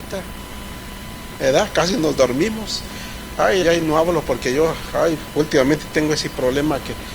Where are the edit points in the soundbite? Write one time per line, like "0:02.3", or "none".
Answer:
0:03.6